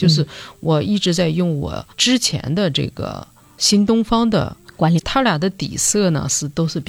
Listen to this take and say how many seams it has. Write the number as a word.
two